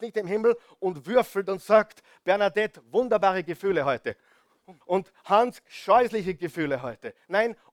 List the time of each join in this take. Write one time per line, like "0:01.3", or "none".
0:04.8